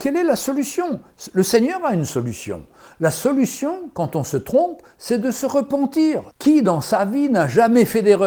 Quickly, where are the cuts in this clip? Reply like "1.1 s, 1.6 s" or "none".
none